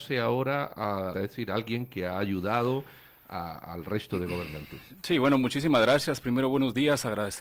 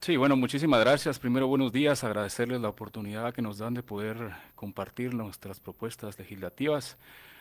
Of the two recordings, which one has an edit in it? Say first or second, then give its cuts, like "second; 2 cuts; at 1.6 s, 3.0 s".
first; 1 cut; at 1.1 s